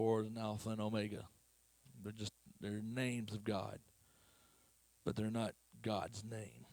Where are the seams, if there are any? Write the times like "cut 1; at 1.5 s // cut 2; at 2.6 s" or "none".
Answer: none